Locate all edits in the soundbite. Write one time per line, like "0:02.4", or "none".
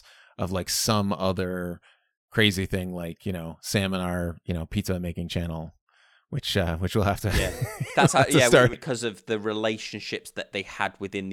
0:08.7